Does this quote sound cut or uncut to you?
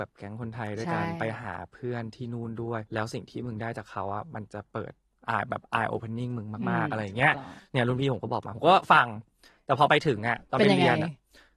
cut